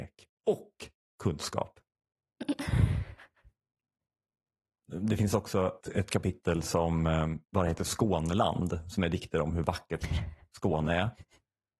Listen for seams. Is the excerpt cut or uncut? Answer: cut